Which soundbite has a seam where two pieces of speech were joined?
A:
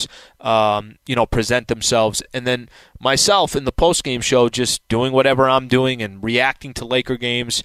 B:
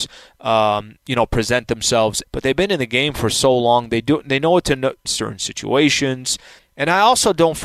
B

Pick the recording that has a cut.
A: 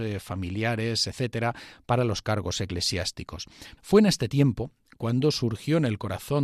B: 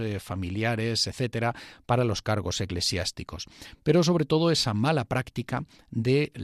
A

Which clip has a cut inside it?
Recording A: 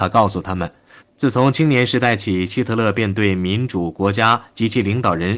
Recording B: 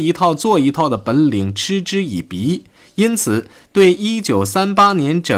A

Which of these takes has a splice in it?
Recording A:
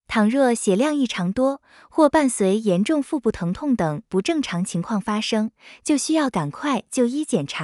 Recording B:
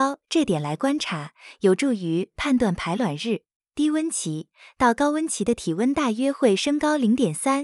B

